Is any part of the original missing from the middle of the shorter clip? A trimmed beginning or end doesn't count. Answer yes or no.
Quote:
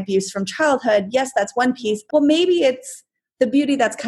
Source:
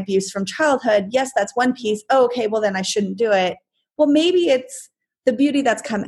yes